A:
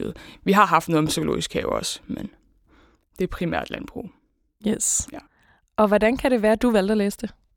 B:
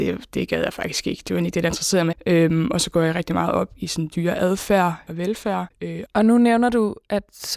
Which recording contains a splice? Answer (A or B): B